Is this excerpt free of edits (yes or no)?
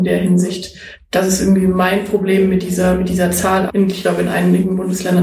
no